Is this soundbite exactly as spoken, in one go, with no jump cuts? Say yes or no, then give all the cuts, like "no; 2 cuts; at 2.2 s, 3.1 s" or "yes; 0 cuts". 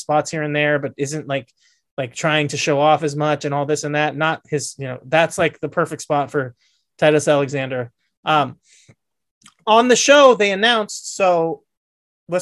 yes; 0 cuts